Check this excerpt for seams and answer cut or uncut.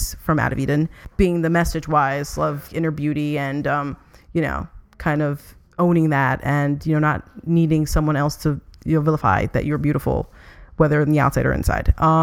cut